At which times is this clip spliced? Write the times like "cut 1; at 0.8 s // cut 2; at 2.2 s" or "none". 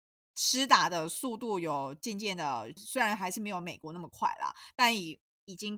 cut 1; at 2.8 s